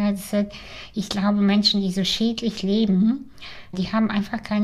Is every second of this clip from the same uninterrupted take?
no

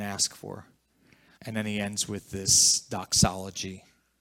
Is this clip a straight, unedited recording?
no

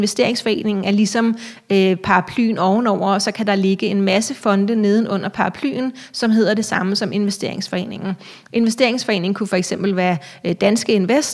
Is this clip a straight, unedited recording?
yes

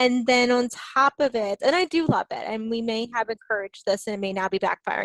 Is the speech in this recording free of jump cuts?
no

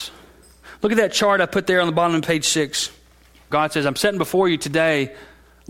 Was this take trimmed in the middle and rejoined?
yes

